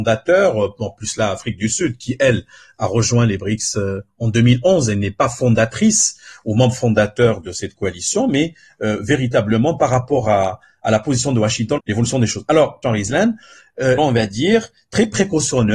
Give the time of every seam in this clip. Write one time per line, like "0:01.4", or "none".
0:11.8
0:12.8
0:14.0